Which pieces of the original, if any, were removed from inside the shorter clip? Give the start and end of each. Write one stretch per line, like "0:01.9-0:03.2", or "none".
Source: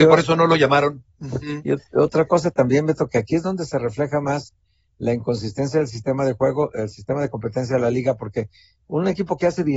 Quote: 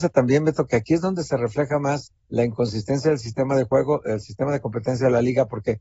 0:04.6-0:04.9

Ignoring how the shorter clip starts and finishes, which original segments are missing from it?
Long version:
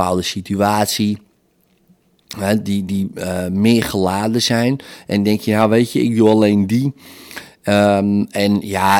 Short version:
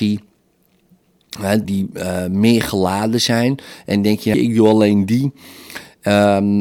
0:02.6-0:02.9
0:05.5-0:05.9

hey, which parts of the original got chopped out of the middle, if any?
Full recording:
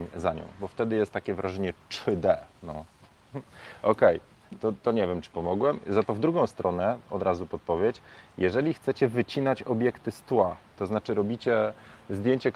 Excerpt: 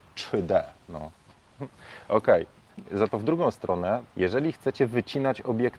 0:04.6-0:05.8
0:07.0-0:08.3

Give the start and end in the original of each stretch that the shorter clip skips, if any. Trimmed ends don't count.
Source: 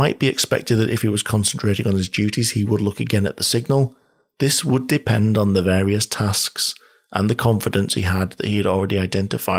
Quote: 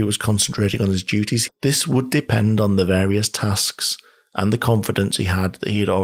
0:02.5-0:04.3

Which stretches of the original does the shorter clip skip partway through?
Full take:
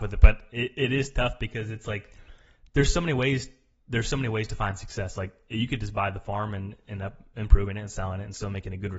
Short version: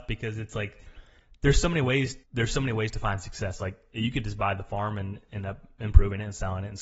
0:03.6-0:03.8

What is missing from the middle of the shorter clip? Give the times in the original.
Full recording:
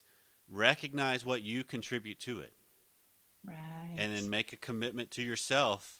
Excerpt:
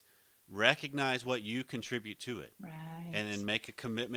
0:02.5-0:03.4

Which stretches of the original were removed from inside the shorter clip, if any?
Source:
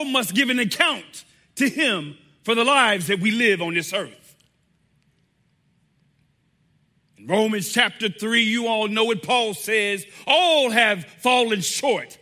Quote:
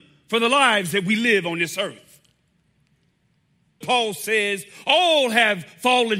0:06.0-0:09.2

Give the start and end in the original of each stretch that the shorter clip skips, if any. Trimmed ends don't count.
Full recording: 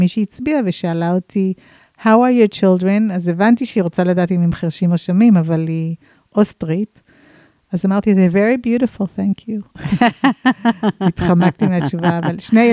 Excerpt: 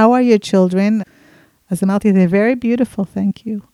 0:03.1-0:07.0

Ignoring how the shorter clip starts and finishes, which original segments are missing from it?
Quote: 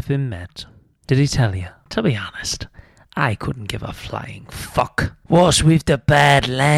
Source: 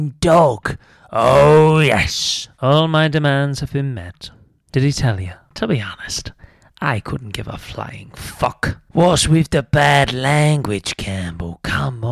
none

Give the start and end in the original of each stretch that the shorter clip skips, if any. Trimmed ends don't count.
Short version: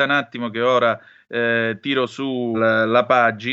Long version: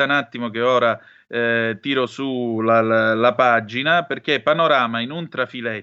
0:02.5-0:02.8

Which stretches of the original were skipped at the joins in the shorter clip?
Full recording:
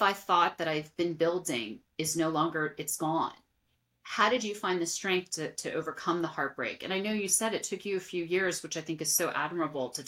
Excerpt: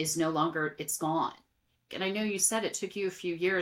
0:03.9-0:06.8

